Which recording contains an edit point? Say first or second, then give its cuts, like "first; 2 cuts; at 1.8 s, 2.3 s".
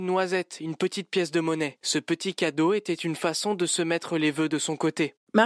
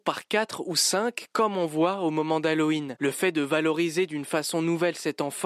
second; 1 cut; at 3.0 s